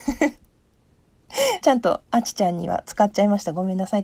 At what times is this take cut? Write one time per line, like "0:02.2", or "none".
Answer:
0:01.6